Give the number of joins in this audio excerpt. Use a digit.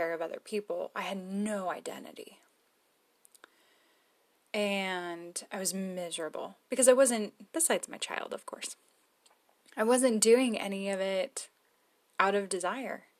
1